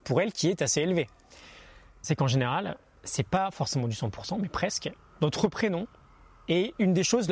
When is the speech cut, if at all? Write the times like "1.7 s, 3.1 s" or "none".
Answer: 2.0 s